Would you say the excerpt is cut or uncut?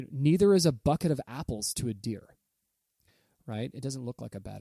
uncut